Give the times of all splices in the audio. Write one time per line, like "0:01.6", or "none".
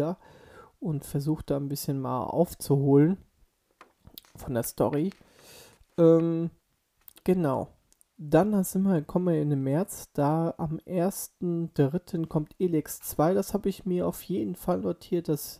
none